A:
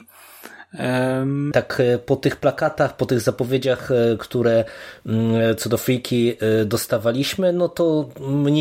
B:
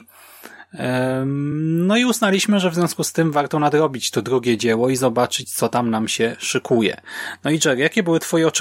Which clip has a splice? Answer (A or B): A